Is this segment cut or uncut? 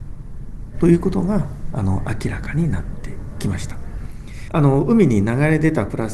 uncut